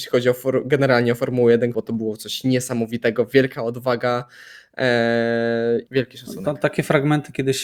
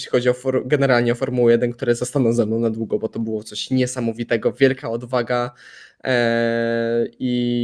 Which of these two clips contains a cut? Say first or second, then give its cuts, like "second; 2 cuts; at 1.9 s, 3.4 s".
first; 2 cuts; at 1.7 s, 5.9 s